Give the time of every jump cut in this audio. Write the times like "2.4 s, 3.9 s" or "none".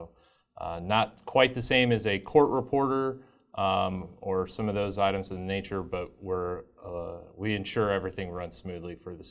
none